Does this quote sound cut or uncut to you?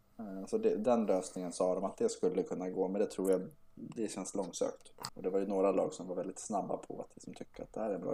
cut